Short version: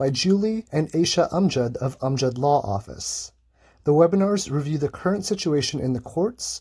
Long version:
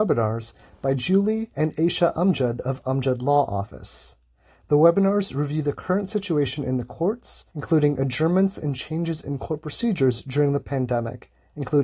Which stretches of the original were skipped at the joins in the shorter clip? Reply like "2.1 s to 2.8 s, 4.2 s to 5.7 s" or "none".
none